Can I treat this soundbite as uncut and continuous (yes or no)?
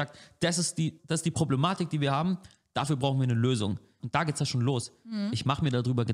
no